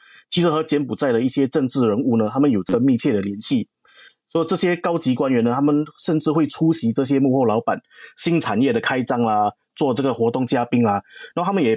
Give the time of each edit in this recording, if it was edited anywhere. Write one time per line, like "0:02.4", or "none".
0:09.7